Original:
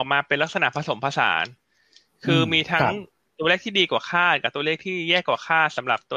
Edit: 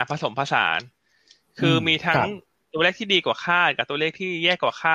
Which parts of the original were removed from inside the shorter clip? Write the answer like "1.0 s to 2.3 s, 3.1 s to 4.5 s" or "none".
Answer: none